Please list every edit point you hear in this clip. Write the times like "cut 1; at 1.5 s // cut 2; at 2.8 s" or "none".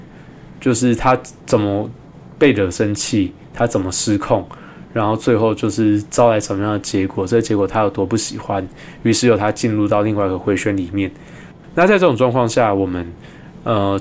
cut 1; at 11.6 s